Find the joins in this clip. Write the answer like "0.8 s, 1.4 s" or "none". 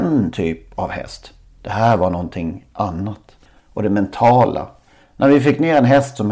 3.6 s, 5.0 s